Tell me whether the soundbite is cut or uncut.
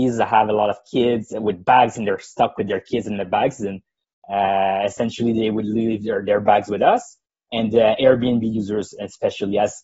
uncut